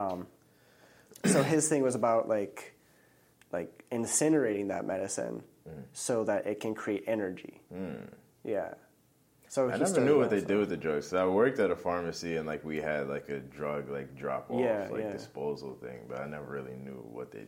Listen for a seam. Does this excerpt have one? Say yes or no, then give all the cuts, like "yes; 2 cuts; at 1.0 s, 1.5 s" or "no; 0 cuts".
yes; 2 cuts; at 3.3 s, 7.7 s